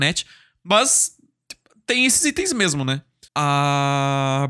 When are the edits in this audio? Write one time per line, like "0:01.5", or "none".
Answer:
0:03.3